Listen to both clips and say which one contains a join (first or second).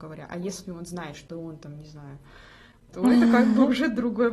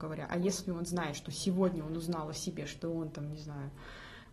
first